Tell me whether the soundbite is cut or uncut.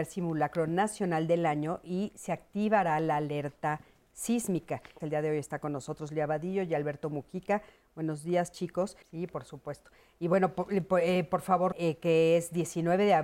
cut